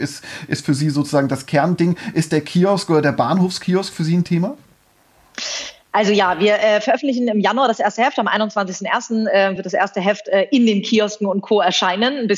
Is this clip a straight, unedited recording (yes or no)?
yes